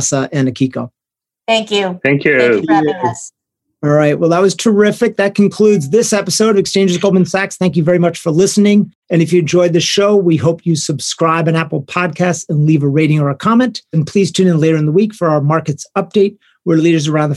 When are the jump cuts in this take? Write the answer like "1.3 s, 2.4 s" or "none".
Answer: none